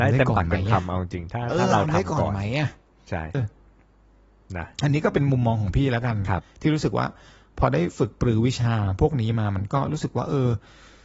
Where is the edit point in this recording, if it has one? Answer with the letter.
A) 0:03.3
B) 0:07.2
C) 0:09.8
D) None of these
A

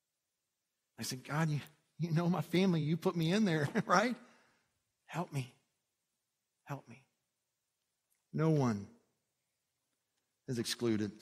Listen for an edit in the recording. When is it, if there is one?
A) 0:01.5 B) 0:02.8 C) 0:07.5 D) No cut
D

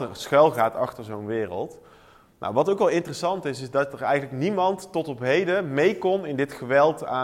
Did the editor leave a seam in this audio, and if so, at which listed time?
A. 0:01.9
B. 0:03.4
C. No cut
C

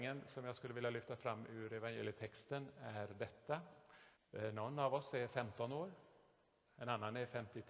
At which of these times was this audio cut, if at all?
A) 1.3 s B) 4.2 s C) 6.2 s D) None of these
B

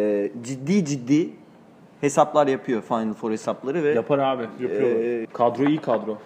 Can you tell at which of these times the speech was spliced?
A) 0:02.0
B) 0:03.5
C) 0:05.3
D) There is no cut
C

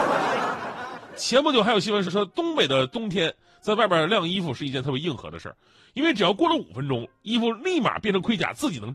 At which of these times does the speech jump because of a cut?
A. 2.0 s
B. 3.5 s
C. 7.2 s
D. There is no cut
A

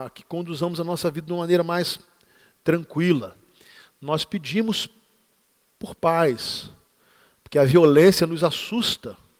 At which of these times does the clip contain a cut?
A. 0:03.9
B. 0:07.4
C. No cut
C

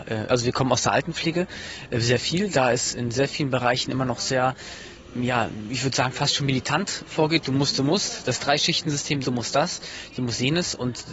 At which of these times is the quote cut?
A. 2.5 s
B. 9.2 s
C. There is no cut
B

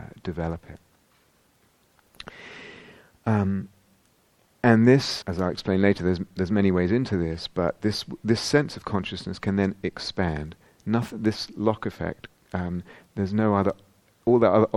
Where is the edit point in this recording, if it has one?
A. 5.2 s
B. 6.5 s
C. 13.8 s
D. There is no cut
A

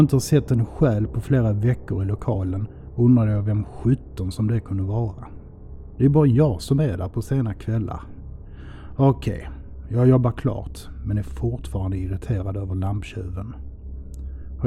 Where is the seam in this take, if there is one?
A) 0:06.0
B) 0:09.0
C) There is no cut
C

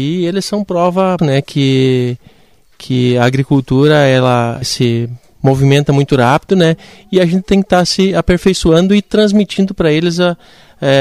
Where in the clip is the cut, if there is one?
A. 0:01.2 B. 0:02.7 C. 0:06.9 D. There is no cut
A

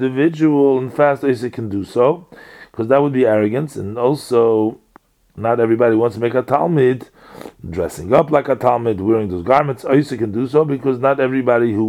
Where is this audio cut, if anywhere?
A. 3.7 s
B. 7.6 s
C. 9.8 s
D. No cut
D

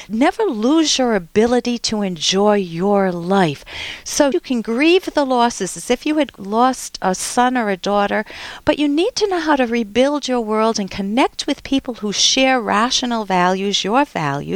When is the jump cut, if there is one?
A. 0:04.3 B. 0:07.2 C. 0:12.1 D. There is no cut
A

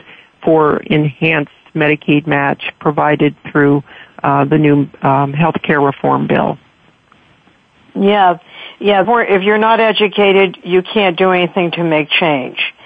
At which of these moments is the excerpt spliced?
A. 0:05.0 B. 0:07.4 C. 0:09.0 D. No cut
C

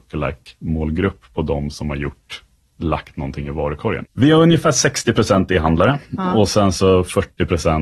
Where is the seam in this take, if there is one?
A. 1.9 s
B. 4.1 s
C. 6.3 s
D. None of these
B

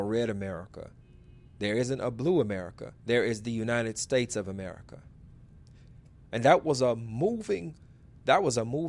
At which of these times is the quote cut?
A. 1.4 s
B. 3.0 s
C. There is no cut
B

